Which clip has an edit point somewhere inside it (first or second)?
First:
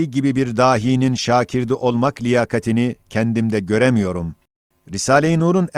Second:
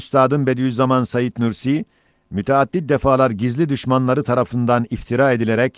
first